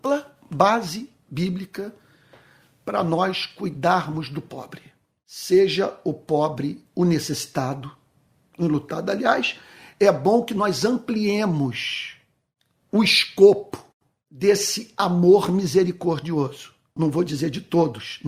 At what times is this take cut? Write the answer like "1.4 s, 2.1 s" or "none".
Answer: 17.0 s